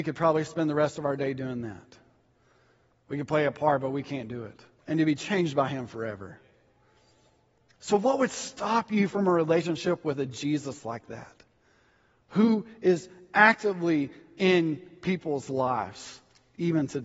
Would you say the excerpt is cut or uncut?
cut